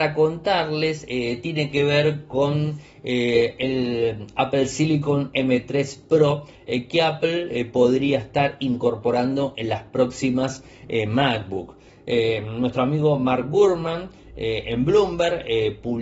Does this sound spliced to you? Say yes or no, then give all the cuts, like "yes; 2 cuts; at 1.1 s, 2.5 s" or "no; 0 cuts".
no; 0 cuts